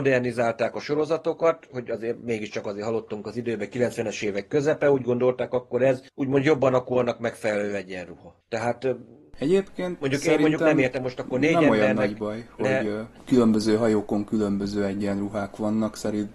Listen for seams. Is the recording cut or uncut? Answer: uncut